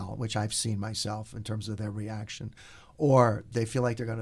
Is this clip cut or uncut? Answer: uncut